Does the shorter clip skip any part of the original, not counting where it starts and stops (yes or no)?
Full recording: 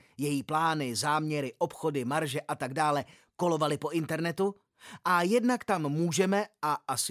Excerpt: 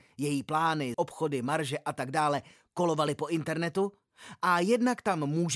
yes